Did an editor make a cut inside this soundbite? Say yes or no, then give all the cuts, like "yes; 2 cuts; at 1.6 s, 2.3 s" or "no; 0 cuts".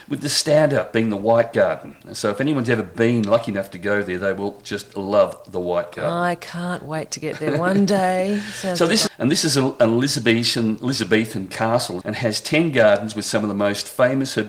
yes; 2 cuts; at 9.1 s, 12.0 s